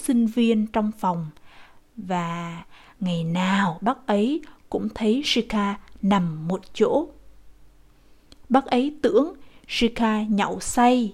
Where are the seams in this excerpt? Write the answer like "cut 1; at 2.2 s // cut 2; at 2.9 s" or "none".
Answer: none